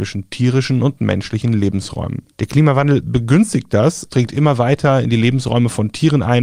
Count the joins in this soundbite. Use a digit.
2